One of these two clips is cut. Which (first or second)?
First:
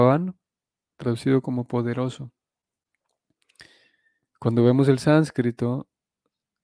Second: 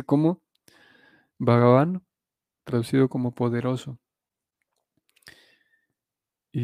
first